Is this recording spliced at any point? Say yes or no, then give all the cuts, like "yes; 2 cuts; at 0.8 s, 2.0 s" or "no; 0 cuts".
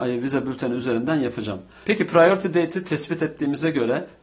yes; 1 cut; at 1.8 s